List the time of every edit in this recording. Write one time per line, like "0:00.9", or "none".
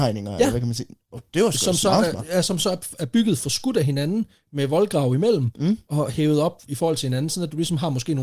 none